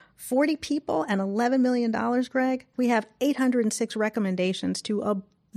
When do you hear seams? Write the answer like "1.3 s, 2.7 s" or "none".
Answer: 2.7 s